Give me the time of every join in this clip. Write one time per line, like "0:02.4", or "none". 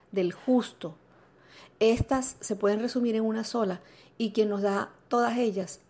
none